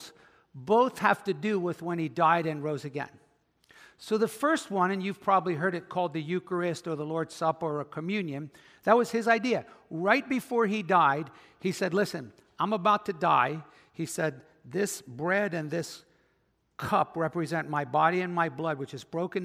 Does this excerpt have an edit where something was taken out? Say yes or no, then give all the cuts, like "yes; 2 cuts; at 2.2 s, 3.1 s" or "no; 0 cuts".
no; 0 cuts